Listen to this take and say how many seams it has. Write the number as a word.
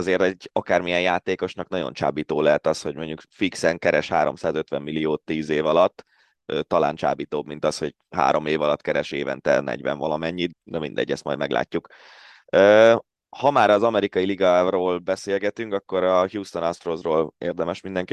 one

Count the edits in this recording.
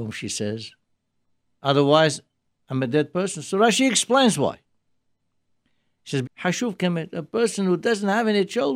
two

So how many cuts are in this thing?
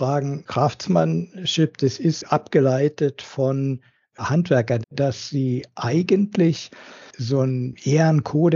one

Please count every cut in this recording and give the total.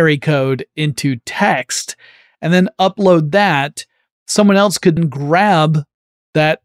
one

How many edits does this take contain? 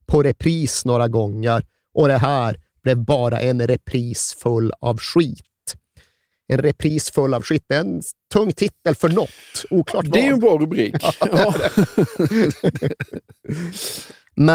zero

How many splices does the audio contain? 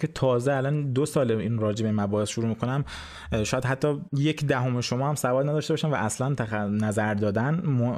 one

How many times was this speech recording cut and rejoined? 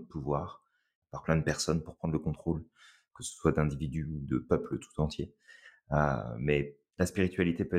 one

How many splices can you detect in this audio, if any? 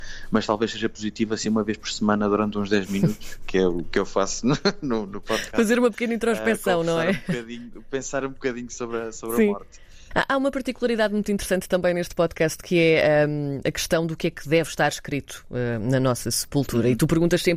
one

